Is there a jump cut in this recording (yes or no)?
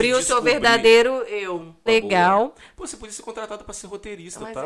yes